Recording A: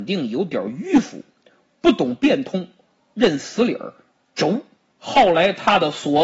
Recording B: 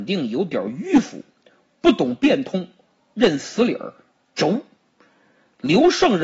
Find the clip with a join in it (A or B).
A